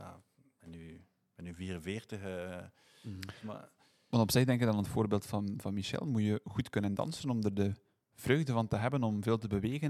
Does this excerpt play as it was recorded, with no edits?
yes; 0 cuts

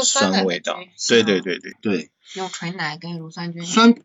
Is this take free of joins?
no; 1 cut; at 1.7 s

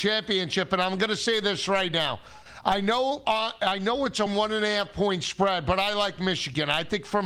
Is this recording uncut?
no; 1 cut; at 4.3 s

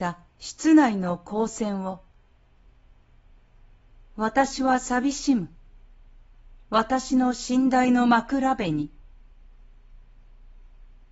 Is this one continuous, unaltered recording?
no; 1 cut; at 6.6 s

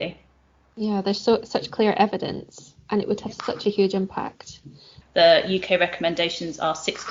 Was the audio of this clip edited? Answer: yes; 1 cut; at 5.0 s

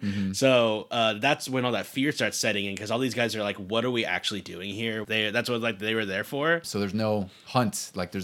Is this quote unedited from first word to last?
no; 2 cuts; at 5.0 s, 6.6 s

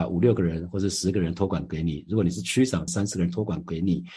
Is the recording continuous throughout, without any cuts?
no; 1 cut; at 2.9 s

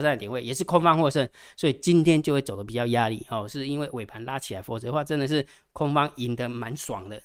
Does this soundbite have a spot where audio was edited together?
no; 0 cuts

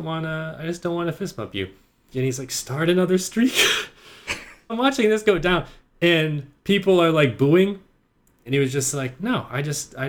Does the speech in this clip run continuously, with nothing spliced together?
no; 3 cuts; at 2.1 s, 4.7 s, 8.5 s

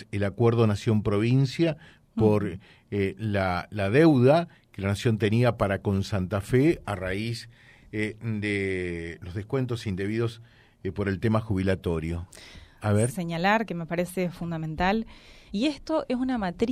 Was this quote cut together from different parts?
yes; 2 cuts; at 13.1 s, 15.5 s

